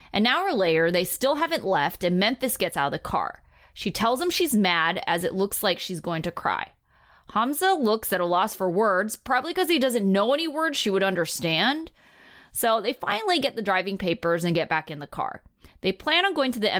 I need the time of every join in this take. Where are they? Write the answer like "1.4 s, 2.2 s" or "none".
none